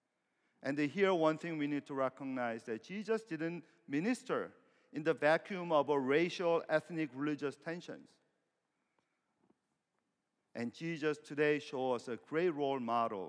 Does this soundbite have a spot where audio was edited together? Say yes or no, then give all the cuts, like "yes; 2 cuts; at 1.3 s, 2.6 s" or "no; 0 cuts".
no; 0 cuts